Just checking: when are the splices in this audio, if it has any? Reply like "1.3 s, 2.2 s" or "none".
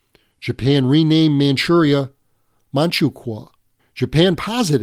3.8 s